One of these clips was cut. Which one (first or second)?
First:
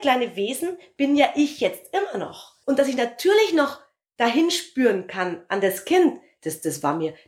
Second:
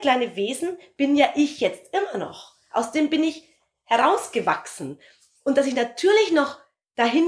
first